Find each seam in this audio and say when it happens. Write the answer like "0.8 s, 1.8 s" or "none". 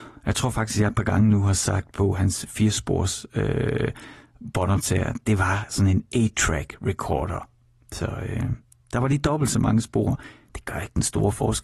none